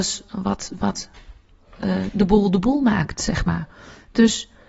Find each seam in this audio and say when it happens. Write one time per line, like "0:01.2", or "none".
none